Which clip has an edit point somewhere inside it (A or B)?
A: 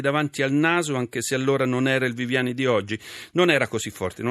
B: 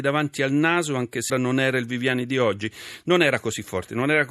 B